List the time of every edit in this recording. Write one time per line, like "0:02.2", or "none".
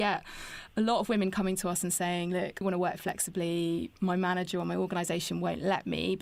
0:02.6